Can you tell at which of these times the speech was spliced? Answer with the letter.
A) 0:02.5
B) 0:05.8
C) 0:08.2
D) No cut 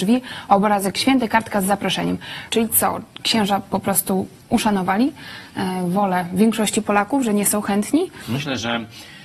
A